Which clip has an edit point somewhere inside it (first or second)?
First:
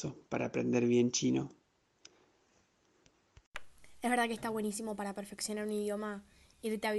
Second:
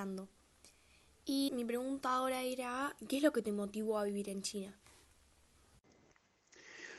second